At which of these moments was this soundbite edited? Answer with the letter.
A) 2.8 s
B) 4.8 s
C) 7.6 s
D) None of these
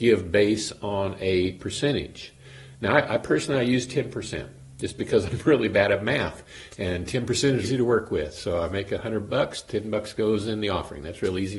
C